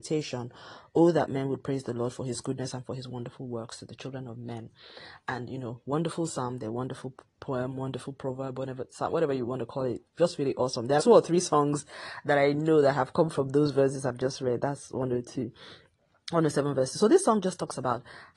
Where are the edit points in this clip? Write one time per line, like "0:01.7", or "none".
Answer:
0:11.0